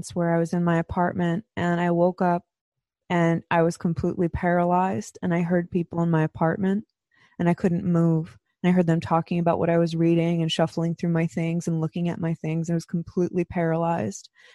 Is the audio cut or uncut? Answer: uncut